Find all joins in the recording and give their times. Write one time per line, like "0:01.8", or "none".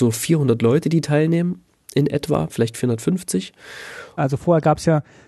0:04.2